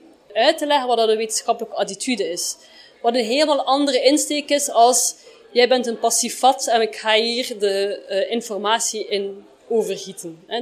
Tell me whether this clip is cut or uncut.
uncut